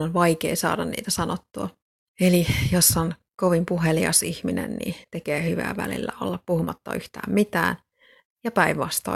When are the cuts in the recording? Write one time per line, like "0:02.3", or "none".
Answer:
0:02.1